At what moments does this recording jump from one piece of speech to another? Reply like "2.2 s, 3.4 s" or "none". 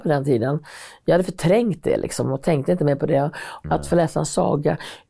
3.6 s